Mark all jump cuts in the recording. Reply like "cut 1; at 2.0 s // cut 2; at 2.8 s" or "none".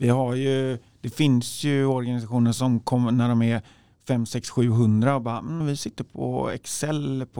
cut 1; at 5.6 s